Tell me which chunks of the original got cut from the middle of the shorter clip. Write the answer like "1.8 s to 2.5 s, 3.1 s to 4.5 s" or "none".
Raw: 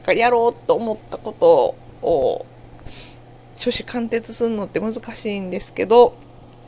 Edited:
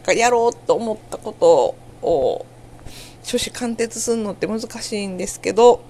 3.2 s to 3.5 s